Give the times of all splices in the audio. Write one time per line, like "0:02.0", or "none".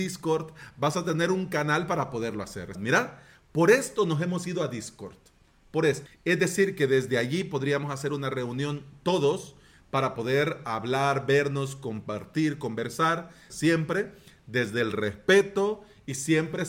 0:02.8
0:06.1
0:13.5